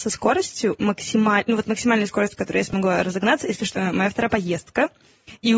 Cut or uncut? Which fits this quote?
cut